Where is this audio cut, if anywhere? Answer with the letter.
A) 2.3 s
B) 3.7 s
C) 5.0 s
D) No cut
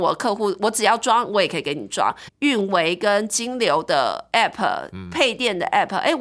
A